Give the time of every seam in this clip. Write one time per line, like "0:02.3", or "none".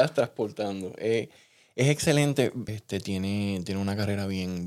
0:02.7